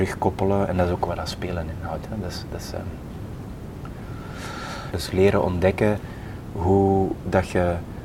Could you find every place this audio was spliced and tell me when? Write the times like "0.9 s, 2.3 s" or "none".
4.9 s